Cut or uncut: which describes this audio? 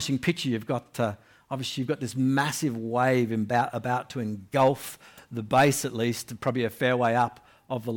uncut